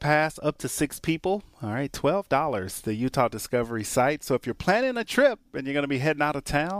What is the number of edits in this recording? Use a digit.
0